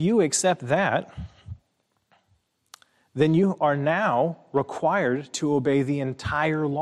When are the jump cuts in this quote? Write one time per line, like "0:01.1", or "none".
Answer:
none